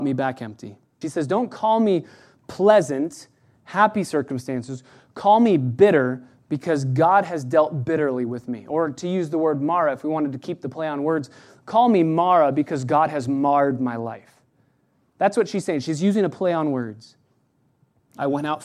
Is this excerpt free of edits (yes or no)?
no